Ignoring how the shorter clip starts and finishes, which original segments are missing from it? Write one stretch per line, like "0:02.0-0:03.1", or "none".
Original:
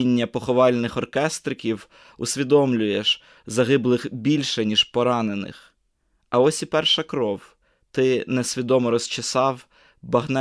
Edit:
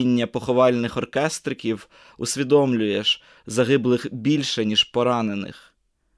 none